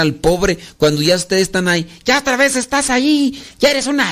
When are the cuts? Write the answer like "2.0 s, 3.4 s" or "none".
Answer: none